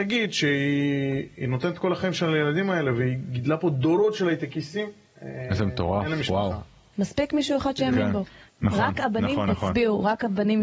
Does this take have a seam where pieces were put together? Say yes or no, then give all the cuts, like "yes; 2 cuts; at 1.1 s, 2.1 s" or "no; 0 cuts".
yes; 2 cuts; at 6.9 s, 8.5 s